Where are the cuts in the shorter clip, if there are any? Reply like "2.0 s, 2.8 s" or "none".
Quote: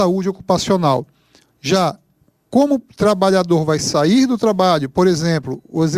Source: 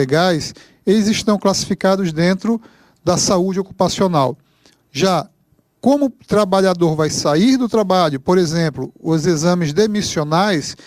none